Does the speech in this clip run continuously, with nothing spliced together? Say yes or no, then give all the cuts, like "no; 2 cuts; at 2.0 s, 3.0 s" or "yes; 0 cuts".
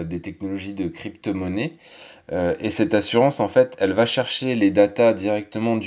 yes; 0 cuts